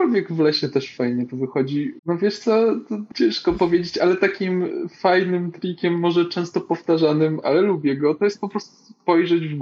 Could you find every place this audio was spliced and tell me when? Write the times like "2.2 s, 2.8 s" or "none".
2.0 s, 3.1 s, 7.4 s